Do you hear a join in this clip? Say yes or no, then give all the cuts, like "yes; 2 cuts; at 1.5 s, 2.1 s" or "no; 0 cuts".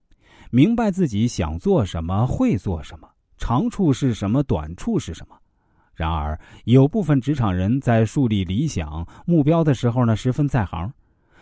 no; 0 cuts